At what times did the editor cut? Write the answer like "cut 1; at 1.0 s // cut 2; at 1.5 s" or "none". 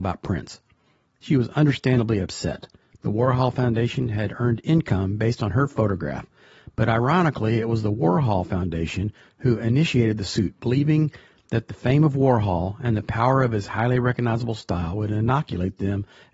none